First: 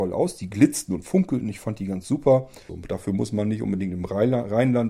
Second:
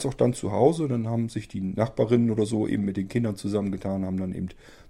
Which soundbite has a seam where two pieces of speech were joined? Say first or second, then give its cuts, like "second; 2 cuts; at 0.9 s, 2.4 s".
first; 1 cut; at 2.7 s